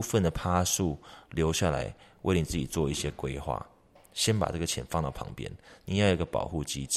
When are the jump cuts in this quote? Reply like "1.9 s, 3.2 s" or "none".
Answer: none